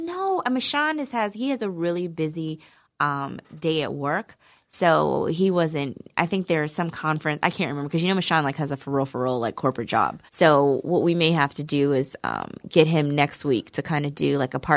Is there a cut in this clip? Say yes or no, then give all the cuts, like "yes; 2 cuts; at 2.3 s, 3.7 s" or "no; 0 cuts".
yes; 1 cut; at 10.3 s